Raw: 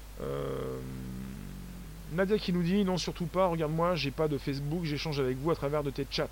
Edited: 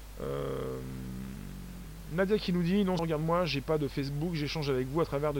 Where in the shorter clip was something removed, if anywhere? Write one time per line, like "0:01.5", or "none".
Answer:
0:03.0